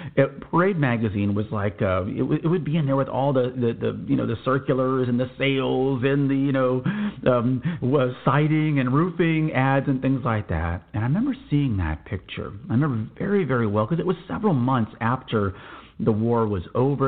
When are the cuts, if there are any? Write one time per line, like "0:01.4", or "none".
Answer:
none